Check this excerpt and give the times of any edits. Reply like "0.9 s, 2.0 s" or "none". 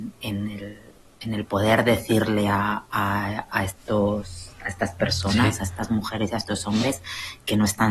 none